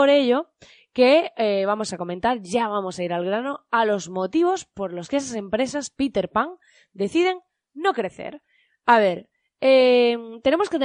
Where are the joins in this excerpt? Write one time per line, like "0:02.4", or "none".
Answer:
none